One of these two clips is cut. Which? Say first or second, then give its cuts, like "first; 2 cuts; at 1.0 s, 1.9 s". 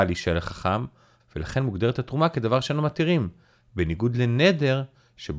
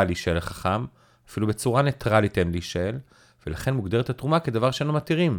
first; 1 cut; at 1.2 s